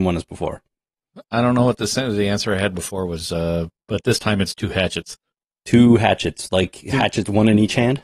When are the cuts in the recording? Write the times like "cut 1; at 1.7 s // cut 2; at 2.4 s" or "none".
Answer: none